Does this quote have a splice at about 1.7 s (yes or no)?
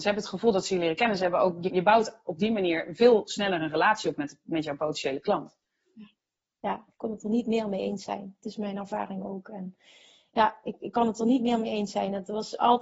yes